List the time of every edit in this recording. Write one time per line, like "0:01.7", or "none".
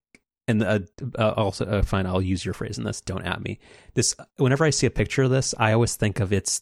none